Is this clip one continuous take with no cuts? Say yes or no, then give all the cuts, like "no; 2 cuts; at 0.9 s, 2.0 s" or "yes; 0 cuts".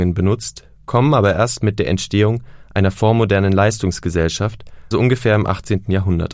no; 1 cut; at 4.9 s